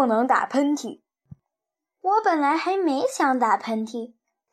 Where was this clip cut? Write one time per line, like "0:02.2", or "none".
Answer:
none